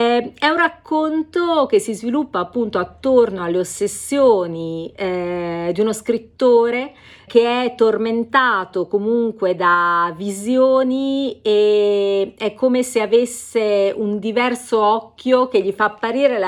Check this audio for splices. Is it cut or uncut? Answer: cut